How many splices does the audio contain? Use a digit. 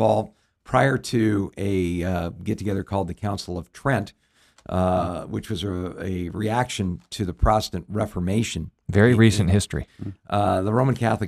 1